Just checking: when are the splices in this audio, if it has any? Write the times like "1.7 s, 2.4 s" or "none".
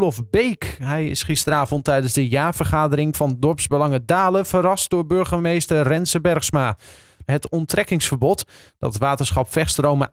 7.2 s